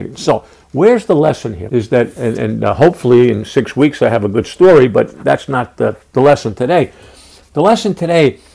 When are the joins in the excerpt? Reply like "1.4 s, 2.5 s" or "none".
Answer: 1.7 s

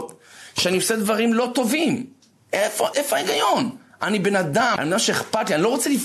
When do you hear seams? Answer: 2.9 s, 4.8 s

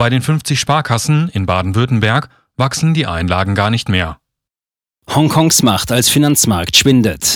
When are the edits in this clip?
none

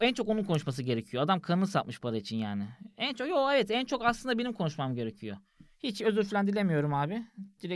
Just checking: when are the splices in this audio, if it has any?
none

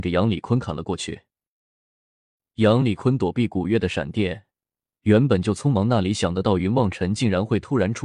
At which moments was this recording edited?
none

